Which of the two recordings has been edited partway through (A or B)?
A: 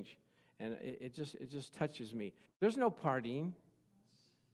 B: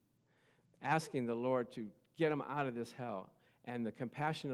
A